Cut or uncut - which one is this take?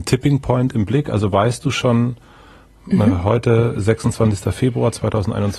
uncut